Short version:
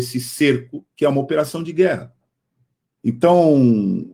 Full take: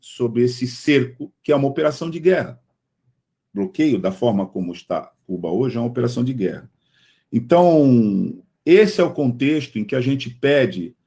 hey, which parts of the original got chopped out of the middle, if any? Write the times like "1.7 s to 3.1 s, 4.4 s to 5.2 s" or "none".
3.4 s to 7.3 s